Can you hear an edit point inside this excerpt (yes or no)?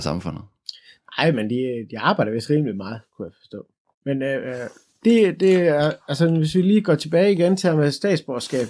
yes